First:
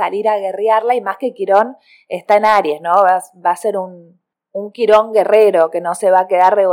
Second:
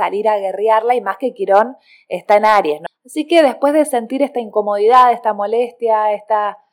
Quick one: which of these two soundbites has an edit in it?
second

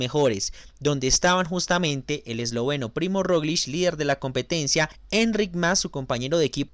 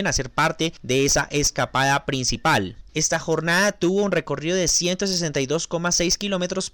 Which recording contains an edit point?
second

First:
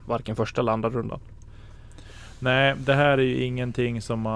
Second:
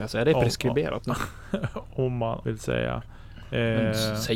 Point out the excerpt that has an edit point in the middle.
second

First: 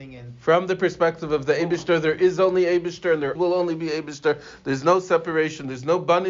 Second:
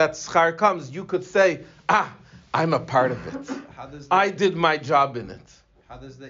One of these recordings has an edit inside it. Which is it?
first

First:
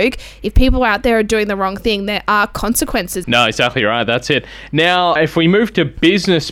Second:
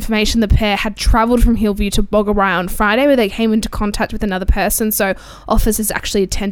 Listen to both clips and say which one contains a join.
first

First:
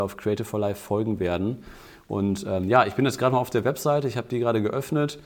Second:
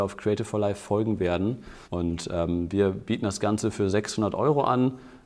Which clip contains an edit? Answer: second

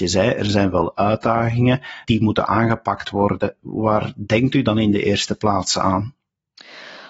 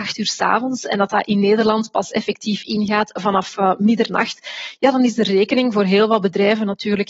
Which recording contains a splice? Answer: first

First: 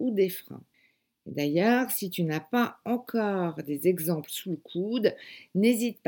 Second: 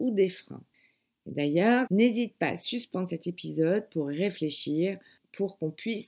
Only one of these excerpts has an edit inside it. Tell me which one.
second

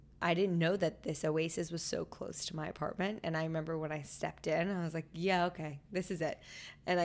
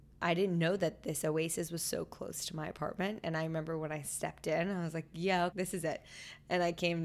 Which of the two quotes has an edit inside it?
second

